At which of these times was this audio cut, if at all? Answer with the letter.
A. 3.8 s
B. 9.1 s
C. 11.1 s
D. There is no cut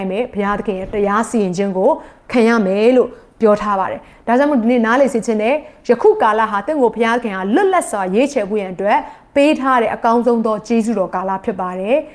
D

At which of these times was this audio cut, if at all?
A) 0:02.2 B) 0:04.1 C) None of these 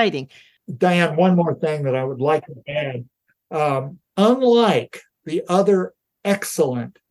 B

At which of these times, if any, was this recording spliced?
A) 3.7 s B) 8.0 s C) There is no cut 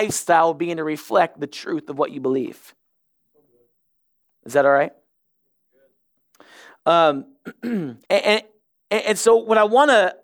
B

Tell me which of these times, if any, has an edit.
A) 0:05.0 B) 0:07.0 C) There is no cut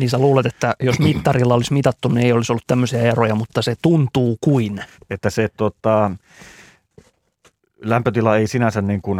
A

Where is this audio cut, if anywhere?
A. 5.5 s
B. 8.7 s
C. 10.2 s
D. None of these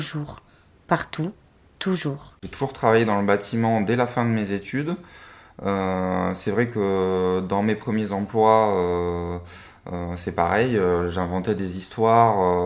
D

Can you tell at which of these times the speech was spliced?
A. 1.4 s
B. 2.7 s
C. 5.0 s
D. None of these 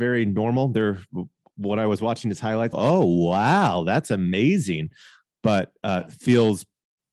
B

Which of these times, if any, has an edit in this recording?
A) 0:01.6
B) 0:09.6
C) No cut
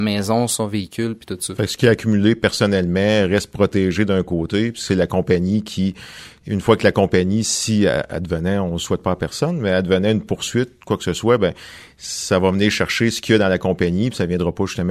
C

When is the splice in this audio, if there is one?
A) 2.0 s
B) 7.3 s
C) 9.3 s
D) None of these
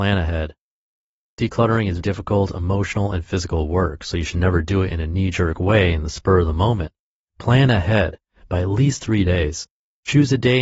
A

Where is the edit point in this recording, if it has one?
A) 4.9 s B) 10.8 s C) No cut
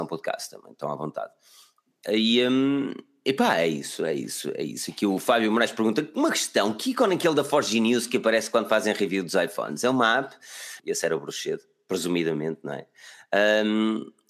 B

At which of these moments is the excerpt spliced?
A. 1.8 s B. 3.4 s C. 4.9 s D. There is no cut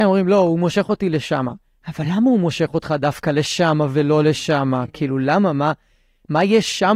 D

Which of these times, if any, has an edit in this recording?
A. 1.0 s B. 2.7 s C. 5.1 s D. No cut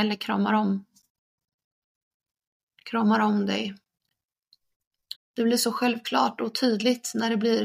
C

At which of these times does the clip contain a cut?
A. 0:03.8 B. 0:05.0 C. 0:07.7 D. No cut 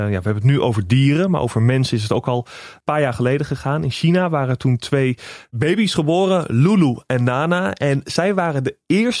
D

